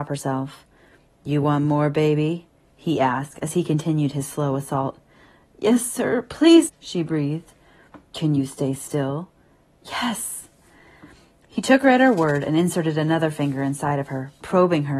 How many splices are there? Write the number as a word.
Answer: one